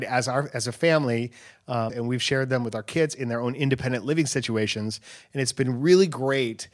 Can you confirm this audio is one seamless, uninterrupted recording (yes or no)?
no